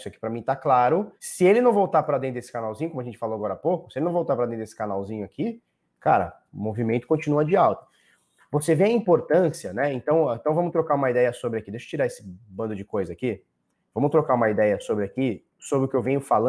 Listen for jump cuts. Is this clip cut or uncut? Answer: cut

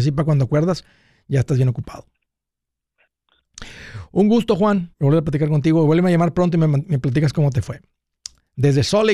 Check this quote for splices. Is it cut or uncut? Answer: cut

